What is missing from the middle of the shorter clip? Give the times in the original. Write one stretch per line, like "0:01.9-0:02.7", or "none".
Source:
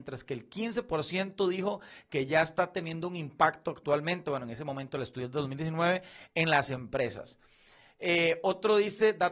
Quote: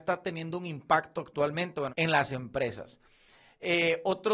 0:04.4-0:06.3